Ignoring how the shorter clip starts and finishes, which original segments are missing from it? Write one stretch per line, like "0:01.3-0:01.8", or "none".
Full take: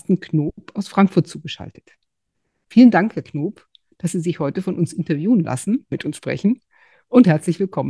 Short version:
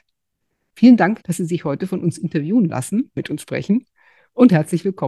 0:03.1-0:04.0